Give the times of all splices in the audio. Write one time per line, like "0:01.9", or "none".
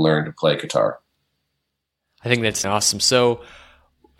0:02.6